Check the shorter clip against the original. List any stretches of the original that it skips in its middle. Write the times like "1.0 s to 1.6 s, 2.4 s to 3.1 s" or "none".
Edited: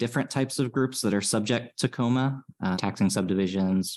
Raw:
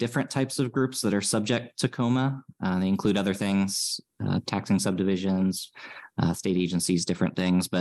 2.7 s to 4.4 s